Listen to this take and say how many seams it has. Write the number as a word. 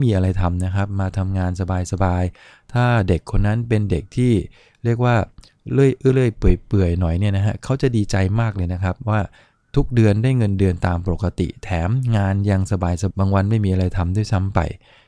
one